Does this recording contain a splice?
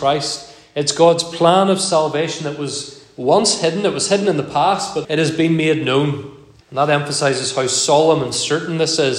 yes; 2 cuts; at 5.0 s, 6.6 s

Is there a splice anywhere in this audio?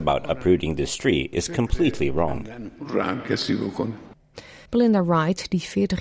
yes; 1 cut; at 4.7 s

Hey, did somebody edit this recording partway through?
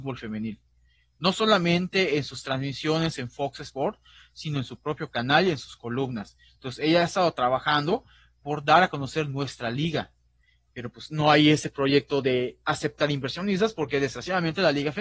no; 0 cuts

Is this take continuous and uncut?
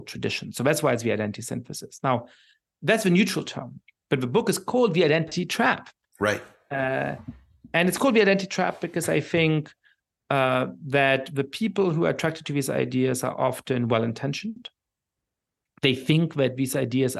yes; 0 cuts

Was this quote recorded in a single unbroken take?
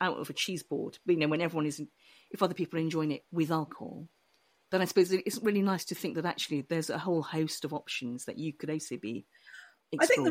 yes; 0 cuts

